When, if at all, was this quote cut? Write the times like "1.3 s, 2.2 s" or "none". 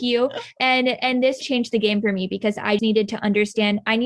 1.4 s, 2.8 s